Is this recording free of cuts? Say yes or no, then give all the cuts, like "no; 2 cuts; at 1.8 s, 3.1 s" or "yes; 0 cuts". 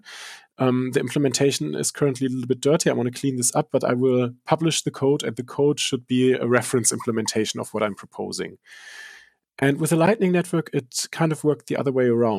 yes; 0 cuts